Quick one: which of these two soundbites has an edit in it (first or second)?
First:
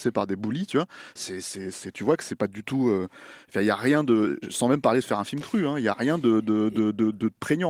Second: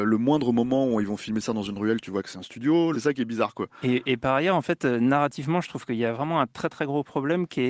second